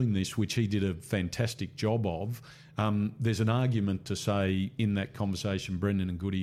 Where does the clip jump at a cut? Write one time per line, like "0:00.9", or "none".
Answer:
none